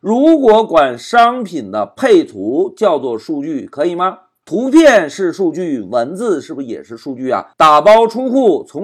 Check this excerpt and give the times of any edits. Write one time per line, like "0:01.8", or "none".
0:04.4
0:07.5